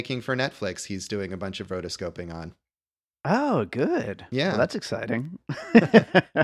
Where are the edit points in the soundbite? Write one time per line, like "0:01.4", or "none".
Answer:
none